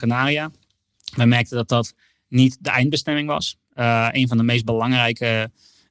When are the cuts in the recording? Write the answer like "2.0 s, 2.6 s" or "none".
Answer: none

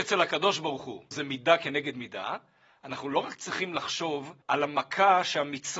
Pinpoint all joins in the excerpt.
1.1 s, 4.4 s

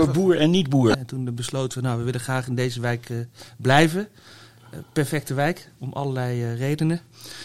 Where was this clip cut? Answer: 0.9 s

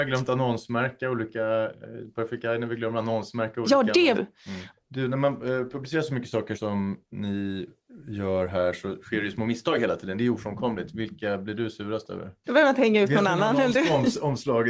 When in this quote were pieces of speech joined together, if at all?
4.1 s, 12.4 s

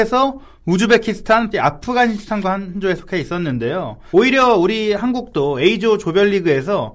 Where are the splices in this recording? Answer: 1.5 s, 4.1 s

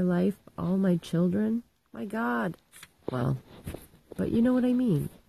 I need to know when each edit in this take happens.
4.2 s

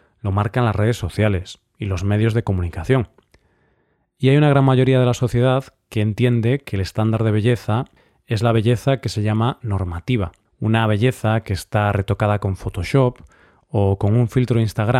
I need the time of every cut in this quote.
10.5 s

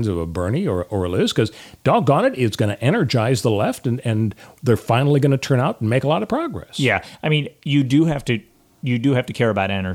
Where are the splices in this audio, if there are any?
none

